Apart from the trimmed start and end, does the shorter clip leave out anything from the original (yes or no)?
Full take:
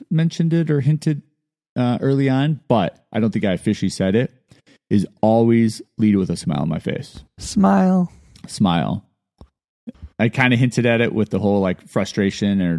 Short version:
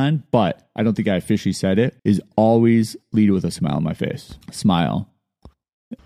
yes